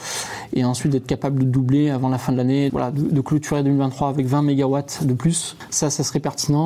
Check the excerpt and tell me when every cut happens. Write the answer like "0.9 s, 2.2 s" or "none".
2.7 s